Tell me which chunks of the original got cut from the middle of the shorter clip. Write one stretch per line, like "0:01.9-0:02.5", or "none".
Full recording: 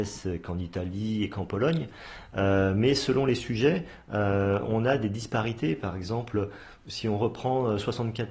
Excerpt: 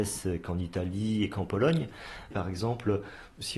0:02.3-0:05.8